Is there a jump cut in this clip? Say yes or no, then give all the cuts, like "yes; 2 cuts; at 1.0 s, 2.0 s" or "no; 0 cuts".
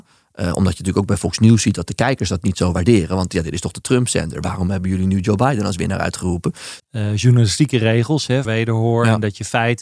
yes; 2 cuts; at 6.8 s, 8.4 s